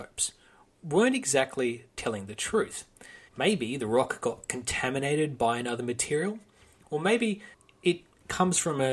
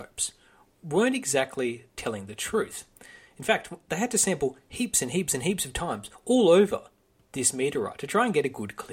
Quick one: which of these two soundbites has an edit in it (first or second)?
first